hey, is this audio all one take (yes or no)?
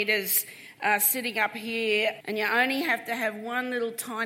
no